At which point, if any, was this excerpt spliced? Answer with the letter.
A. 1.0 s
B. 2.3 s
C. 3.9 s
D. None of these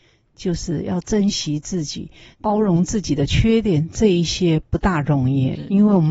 B